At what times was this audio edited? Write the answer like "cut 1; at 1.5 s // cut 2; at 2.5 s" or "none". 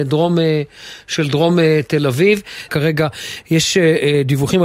cut 1; at 2.7 s